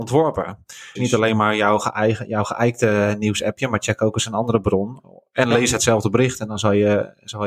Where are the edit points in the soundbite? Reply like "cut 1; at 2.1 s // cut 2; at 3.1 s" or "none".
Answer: cut 1; at 1.0 s